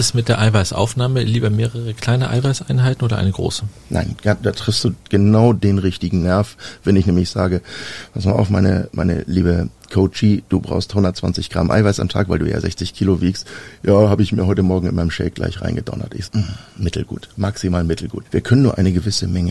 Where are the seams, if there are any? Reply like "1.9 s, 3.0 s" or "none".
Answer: 16.3 s, 18.3 s